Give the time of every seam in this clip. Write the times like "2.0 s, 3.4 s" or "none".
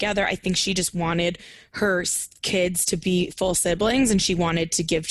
none